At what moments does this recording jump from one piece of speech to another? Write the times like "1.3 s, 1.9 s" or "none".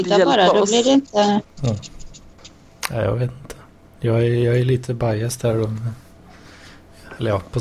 1.6 s